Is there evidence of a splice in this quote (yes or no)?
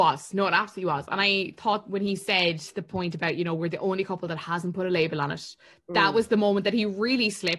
no